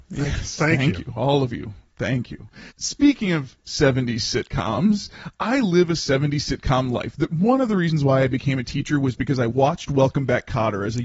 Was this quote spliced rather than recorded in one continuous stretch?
yes; 1 cut; at 2.7 s

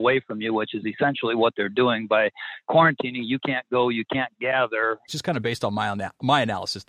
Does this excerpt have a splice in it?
yes; 1 cut; at 5.1 s

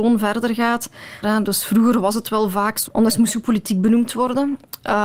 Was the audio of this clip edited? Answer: yes; 2 cuts; at 1.2 s, 2.9 s

